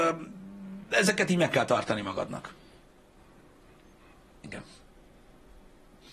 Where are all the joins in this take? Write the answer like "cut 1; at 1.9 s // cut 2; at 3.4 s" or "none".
cut 1; at 4.3 s